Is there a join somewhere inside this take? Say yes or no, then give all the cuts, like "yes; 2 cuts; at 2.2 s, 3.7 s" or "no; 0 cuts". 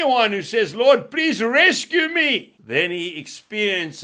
no; 0 cuts